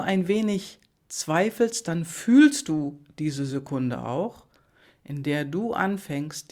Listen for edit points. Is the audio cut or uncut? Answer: uncut